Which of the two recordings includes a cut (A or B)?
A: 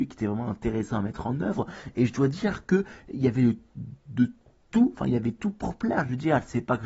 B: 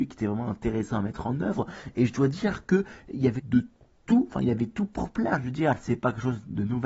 B